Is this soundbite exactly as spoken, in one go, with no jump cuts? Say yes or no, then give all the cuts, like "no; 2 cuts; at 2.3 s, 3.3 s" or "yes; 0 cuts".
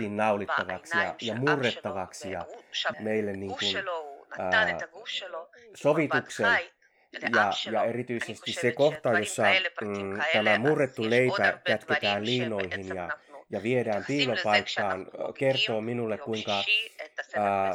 no; 1 cut; at 2.9 s